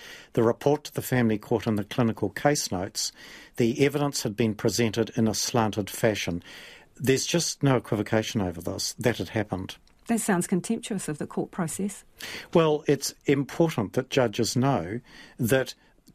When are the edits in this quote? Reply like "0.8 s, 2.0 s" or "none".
12.8 s